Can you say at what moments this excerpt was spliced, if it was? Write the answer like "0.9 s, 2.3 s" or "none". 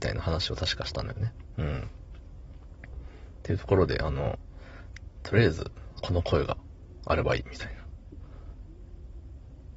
6.0 s